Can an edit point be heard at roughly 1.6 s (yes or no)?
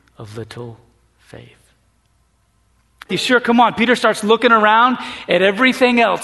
no